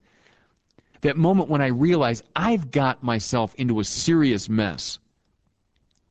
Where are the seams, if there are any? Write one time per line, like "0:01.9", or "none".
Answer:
0:00.9